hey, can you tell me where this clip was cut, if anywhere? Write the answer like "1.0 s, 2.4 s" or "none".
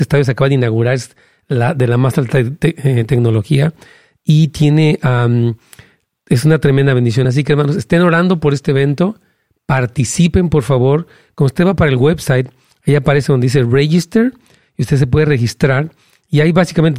none

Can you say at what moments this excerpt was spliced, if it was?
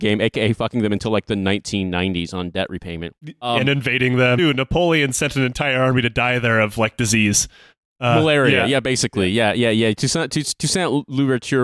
4.4 s

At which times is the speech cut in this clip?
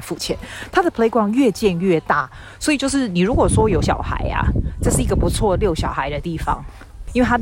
3.8 s

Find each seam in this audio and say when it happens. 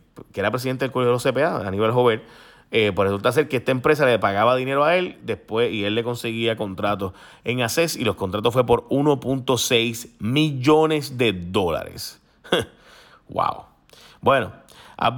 none

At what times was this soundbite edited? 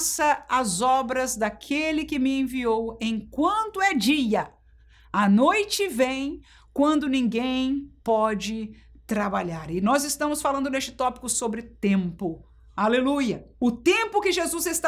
13.5 s

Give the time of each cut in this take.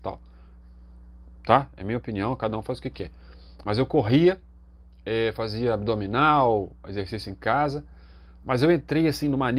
none

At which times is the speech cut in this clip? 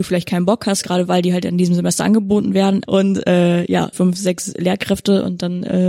2.8 s, 3.9 s

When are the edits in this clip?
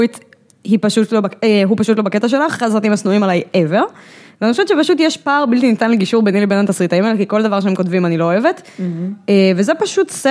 none

